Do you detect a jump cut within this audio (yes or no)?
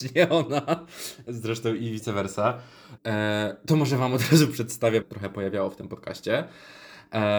yes